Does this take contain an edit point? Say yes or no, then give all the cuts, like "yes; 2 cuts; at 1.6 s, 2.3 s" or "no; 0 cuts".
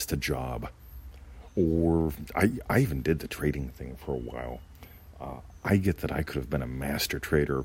no; 0 cuts